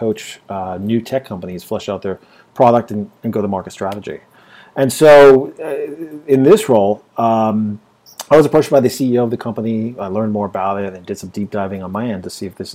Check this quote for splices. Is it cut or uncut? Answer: uncut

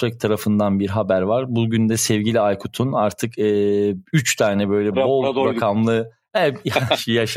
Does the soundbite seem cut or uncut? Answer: cut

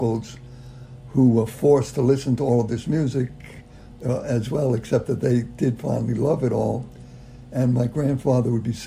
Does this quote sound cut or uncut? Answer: uncut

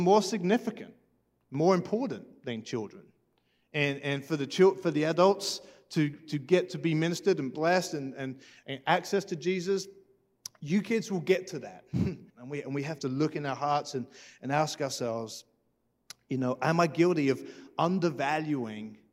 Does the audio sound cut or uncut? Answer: cut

